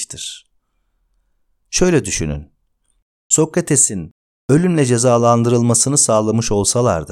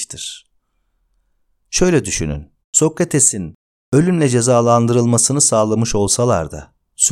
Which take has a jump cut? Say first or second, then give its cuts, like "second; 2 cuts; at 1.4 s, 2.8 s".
second; 1 cut; at 2.6 s